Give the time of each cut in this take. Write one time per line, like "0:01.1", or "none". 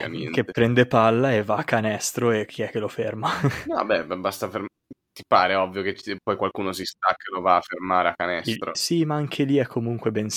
0:08.7